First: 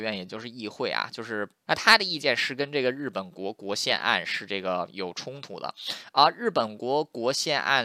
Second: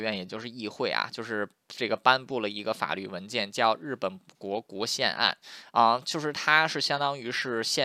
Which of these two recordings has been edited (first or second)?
first